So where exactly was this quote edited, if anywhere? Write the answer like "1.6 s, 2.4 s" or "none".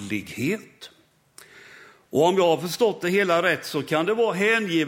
none